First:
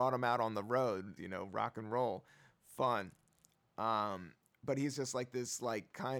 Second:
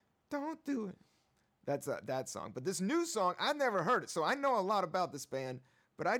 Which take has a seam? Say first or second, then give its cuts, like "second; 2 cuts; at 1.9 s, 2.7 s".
first; 1 cut; at 1.2 s